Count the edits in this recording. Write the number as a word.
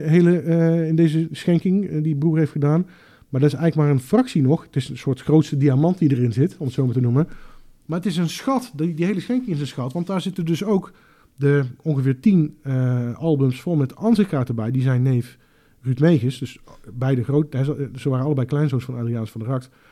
zero